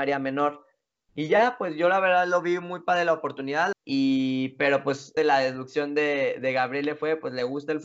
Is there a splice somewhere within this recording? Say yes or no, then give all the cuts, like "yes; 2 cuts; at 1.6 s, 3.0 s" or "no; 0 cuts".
yes; 2 cuts; at 3.7 s, 5.2 s